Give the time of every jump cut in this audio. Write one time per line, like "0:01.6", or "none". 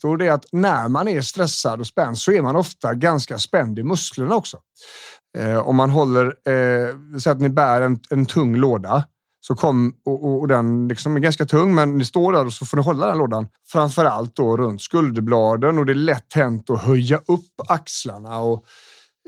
0:05.2
0:13.6